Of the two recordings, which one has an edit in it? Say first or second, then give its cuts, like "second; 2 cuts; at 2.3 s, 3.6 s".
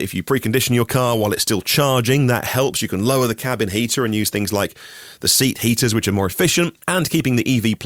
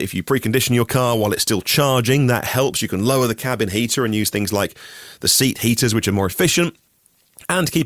first; 1 cut; at 6.8 s